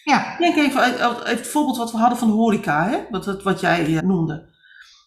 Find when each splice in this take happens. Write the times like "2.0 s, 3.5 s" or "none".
4.0 s